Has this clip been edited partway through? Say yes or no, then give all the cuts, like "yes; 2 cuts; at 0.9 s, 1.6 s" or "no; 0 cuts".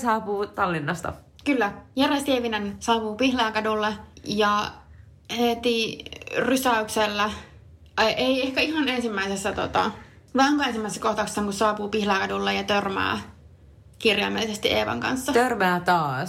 no; 0 cuts